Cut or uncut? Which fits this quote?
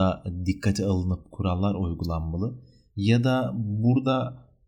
uncut